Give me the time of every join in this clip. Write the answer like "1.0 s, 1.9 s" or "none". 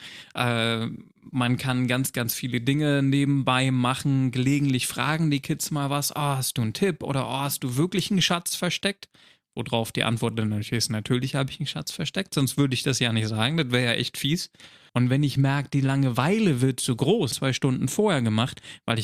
14.9 s, 17.3 s